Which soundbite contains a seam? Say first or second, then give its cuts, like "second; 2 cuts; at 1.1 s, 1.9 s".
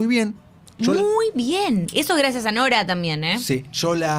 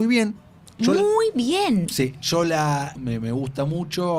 second; 2 cuts; at 1.9 s, 2.9 s